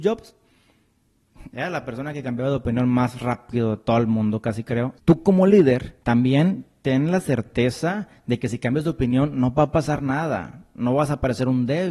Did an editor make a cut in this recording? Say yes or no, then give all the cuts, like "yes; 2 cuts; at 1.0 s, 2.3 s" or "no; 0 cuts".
yes; 2 cuts; at 5.0 s, 6.0 s